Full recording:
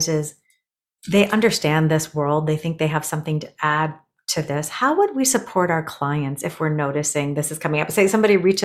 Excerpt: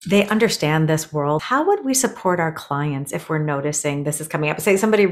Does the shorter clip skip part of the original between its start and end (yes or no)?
yes